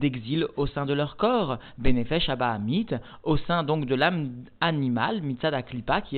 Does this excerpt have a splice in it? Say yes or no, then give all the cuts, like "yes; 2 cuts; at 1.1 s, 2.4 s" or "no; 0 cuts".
no; 0 cuts